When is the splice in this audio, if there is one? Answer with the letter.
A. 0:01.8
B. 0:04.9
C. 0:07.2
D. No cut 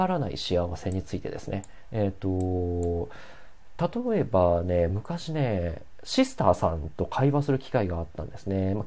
B